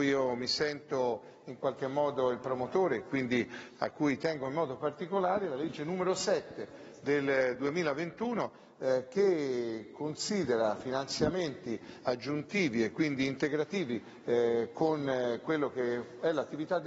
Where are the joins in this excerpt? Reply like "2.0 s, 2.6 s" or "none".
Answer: none